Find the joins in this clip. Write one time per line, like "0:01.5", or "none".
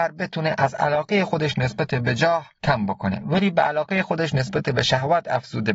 0:02.5